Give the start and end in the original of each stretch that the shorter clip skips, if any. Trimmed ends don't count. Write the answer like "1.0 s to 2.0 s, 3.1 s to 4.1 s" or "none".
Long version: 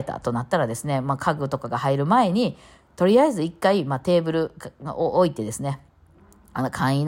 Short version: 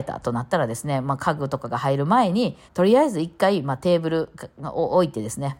2.7 s to 2.9 s

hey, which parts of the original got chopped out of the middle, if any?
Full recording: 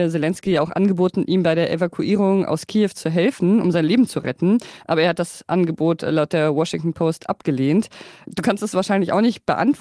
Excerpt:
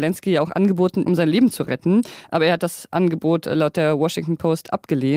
1.3 s to 3.6 s

